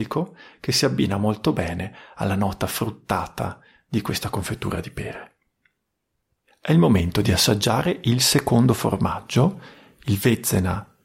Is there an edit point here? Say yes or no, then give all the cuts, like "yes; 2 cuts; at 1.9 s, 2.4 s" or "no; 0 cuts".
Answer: no; 0 cuts